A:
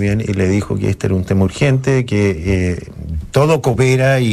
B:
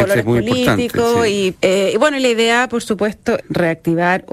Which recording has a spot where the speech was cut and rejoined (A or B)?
B